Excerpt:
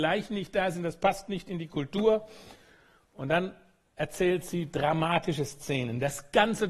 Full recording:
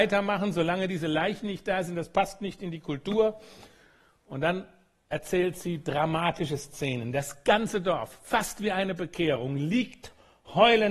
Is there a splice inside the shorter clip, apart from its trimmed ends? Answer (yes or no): no